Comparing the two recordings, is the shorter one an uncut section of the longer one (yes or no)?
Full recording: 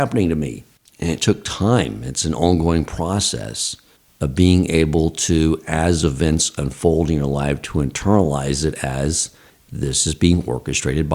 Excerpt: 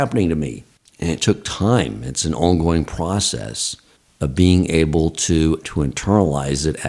no